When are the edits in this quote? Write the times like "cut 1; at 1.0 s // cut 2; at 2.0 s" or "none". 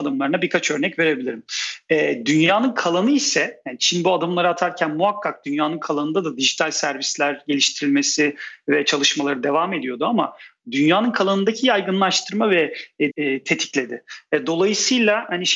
cut 1; at 13.1 s